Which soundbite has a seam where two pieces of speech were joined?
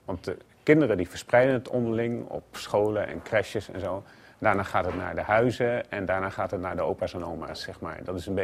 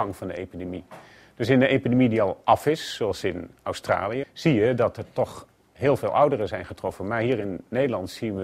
second; 1 cut; at 4.2 s

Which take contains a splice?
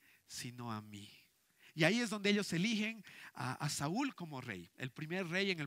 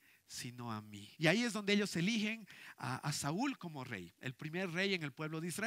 second; 1 cut; at 1.1 s

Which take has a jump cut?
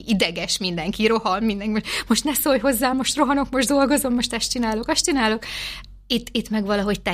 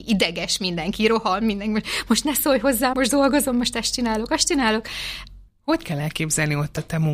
second; 2 cuts; at 2.9 s, 5.5 s

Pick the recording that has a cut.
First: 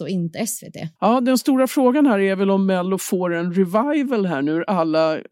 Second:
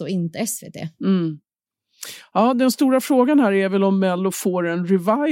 first; 1 cut; at 1.0 s

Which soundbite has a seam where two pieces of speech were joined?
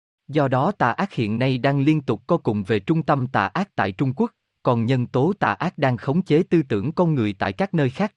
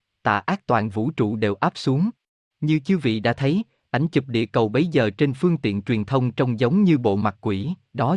second; 1 cut; at 2.5 s

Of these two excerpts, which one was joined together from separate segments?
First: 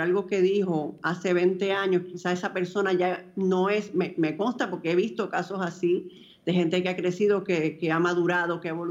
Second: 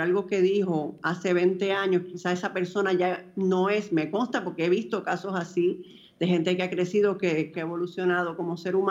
second; 2 cuts; at 3.9 s, 7.5 s

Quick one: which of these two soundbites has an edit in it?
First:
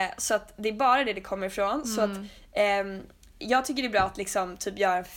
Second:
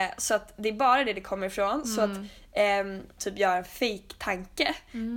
second; 1 cut; at 3.2 s

